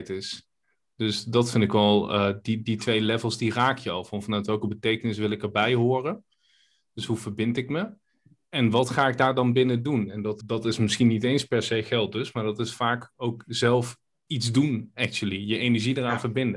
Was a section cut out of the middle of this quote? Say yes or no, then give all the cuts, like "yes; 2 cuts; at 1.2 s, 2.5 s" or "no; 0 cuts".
yes; 1 cut; at 10.4 s